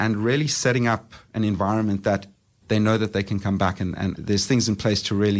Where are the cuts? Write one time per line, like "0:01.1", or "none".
0:02.6
0:04.1